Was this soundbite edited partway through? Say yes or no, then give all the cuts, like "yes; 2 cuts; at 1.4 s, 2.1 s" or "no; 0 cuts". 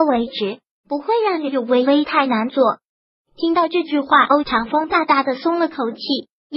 no; 0 cuts